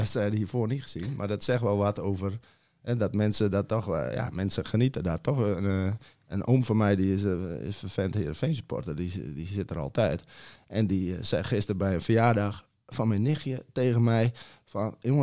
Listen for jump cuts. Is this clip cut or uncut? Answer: uncut